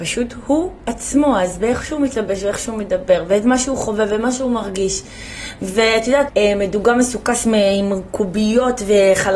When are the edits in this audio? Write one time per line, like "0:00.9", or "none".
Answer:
0:06.3

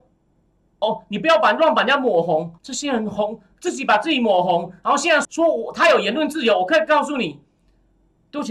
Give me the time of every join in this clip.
0:02.6
0:05.2

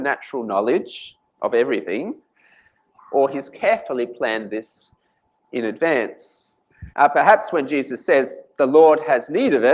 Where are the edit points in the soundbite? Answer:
0:06.9

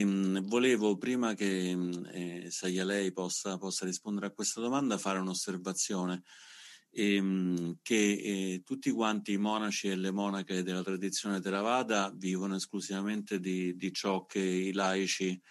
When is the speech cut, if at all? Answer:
none

